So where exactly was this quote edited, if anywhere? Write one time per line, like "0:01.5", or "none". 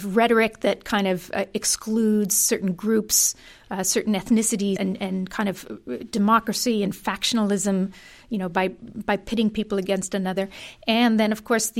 0:04.8